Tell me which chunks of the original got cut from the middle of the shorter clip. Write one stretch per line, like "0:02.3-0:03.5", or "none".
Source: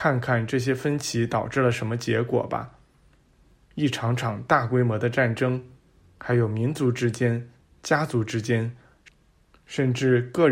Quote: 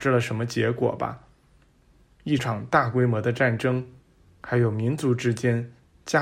0:03.9-0:04.2